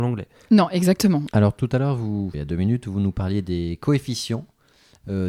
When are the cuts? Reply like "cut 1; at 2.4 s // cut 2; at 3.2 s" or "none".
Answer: cut 1; at 1.3 s // cut 2; at 2.3 s